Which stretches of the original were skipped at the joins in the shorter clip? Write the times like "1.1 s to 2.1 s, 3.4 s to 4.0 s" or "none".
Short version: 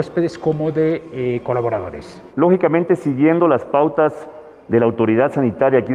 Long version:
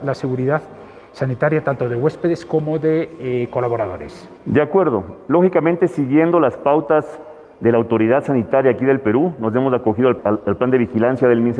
4.4 s to 5.2 s